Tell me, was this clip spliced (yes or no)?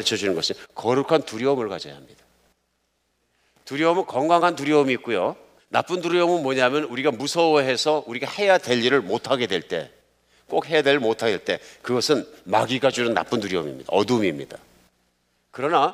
yes